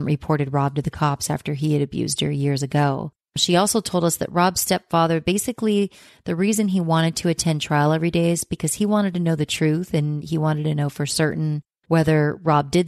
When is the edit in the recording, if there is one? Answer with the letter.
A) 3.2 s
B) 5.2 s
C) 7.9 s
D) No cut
D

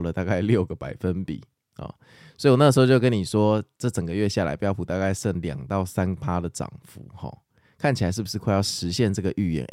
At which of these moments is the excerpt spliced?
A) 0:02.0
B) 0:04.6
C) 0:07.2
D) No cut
D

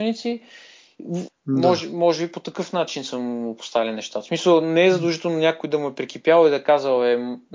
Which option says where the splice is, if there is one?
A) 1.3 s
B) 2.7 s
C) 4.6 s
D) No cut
A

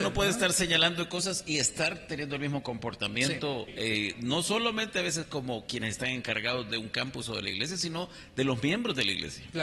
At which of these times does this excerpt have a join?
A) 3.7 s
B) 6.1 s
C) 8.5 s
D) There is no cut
A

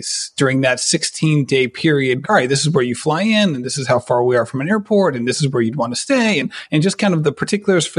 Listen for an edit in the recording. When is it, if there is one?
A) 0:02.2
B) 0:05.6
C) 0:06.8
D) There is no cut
A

